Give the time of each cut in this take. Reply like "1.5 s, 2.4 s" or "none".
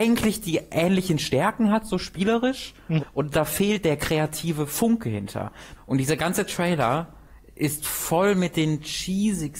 3.0 s, 5.8 s